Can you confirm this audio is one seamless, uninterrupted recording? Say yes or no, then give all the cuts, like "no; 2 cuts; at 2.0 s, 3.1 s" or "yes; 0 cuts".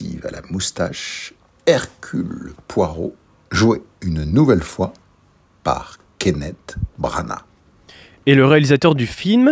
yes; 0 cuts